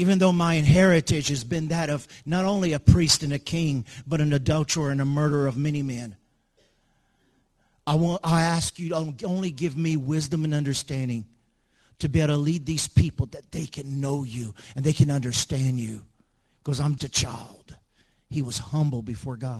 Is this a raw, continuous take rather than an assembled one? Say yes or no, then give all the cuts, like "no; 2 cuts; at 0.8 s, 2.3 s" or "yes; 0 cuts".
no; 1 cut; at 17.0 s